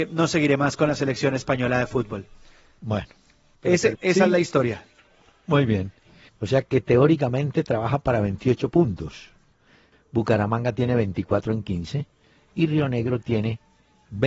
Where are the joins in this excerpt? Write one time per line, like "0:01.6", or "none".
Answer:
0:03.9
0:06.3
0:09.9

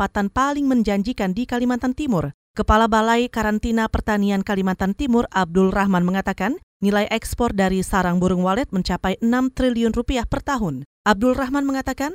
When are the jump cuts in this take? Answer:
none

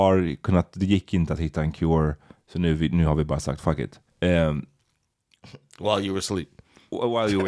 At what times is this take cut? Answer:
0:04.1

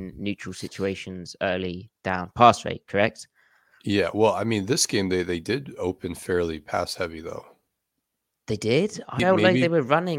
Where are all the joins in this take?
0:09.2

